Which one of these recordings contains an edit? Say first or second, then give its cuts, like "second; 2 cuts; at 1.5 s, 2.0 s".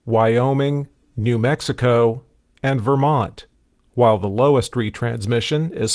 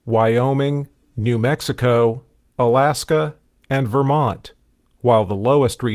first; 1 cut; at 2.4 s